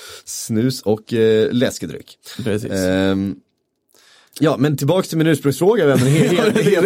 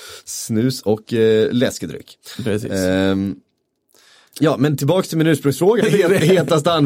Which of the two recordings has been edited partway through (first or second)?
second